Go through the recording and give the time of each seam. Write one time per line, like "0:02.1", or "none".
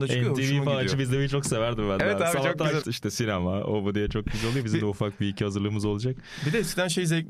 0:02.8